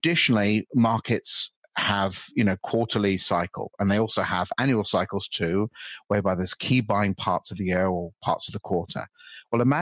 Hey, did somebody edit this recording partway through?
no; 0 cuts

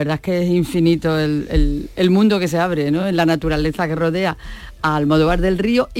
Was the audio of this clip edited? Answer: no; 0 cuts

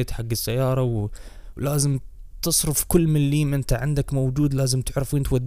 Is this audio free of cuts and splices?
no; 1 cut; at 1.5 s

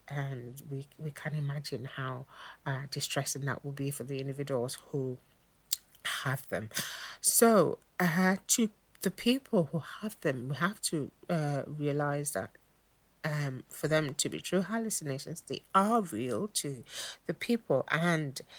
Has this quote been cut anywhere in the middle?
no; 0 cuts

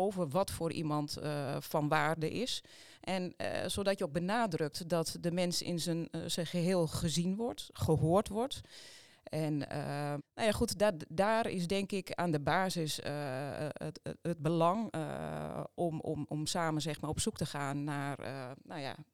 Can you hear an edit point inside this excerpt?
yes; 2 cuts; at 9.1 s, 10.2 s

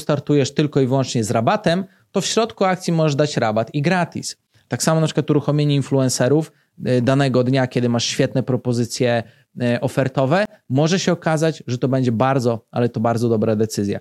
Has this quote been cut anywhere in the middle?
yes; 1 cut; at 4.7 s

